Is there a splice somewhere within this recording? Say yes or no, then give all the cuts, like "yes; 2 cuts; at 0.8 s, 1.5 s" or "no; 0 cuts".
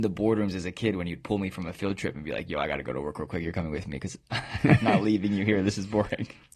no; 0 cuts